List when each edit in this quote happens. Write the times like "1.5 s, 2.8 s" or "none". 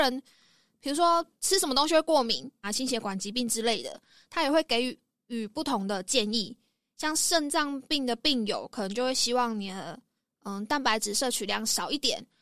2.6 s

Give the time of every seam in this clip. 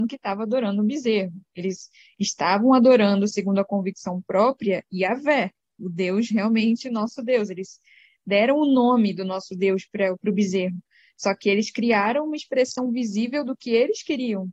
5.8 s

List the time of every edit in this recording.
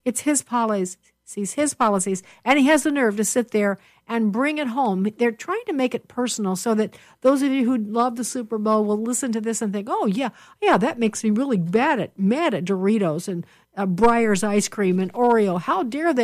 none

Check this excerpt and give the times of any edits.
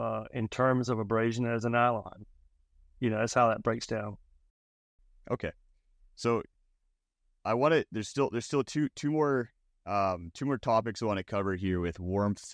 none

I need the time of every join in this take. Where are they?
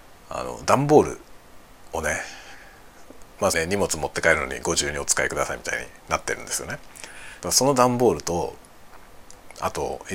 3.5 s, 7.4 s

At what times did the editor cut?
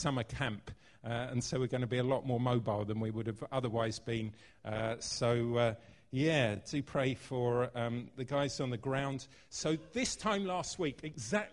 none

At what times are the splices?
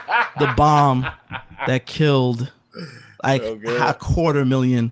none

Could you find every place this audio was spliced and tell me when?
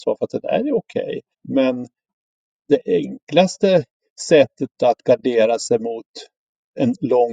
1.3 s

